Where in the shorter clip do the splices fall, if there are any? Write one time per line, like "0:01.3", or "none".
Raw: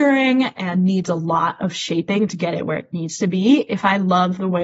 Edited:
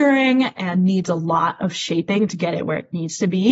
none